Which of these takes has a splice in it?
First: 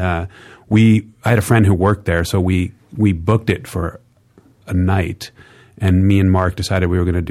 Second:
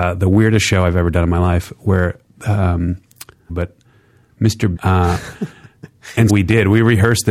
second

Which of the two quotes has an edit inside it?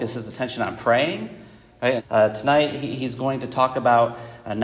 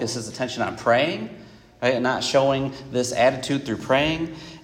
first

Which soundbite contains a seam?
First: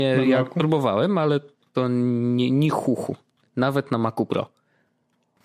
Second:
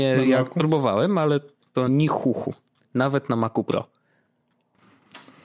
second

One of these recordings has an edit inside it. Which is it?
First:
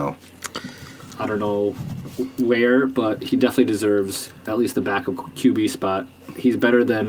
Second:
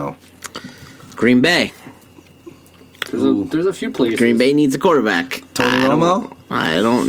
first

